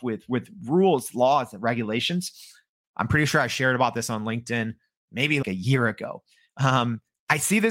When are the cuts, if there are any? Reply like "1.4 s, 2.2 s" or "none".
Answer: 2.8 s, 5.4 s